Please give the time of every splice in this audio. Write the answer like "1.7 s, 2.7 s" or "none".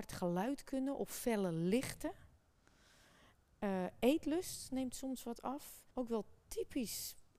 5.9 s